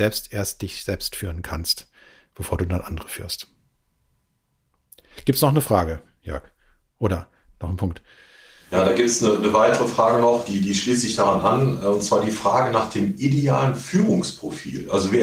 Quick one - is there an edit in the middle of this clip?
no; 0 cuts

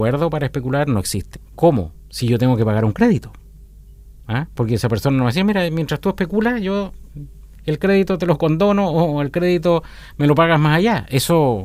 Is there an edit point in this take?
yes; 1 cut; at 1.3 s

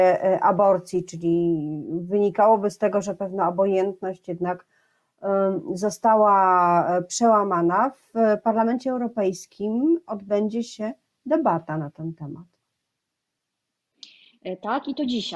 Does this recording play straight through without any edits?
yes; 0 cuts

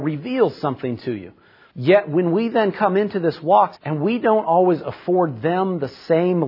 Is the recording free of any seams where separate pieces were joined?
no; 2 cuts; at 1.7 s, 3.8 s

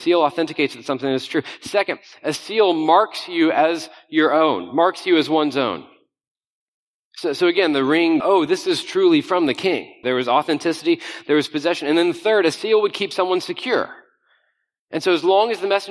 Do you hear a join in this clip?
yes; 2 cuts; at 8.2 s, 10.0 s

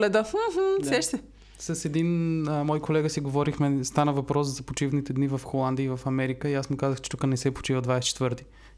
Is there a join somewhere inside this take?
no; 0 cuts

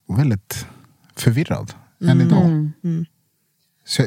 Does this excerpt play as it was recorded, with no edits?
yes; 0 cuts

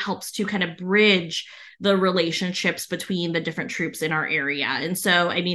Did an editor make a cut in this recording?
no; 0 cuts

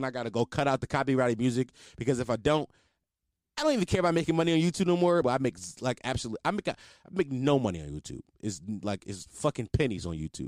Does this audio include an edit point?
yes; 1 cut; at 5.2 s

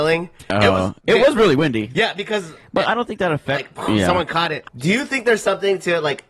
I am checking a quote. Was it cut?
yes; 2 cuts; at 3.5 s, 4.6 s

